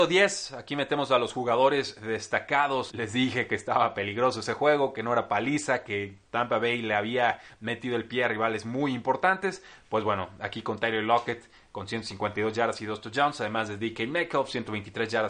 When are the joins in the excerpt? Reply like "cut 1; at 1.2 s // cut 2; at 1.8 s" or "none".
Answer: cut 1; at 2.9 s